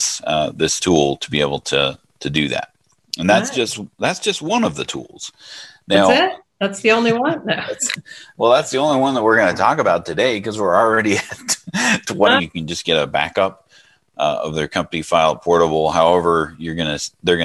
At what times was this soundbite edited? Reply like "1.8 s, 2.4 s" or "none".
12.4 s